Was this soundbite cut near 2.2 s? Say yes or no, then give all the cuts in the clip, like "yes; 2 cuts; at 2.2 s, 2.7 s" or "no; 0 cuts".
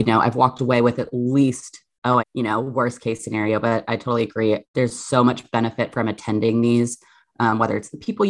yes; 2 cuts; at 2.2 s, 4.6 s